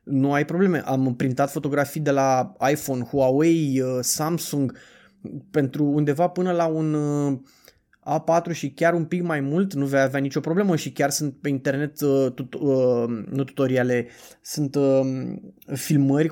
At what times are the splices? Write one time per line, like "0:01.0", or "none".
none